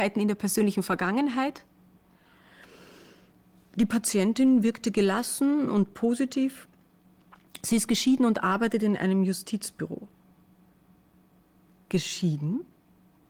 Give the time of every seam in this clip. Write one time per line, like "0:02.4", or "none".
none